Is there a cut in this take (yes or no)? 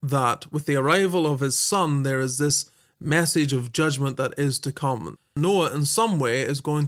yes